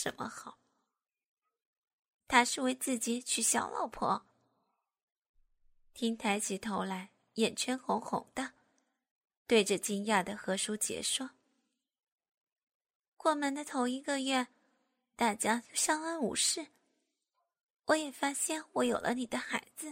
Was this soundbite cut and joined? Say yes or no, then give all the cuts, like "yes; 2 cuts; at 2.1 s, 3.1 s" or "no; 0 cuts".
yes; 1 cut; at 2.2 s